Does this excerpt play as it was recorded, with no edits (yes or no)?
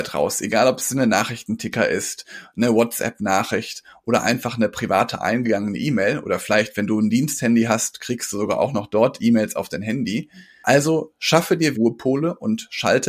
no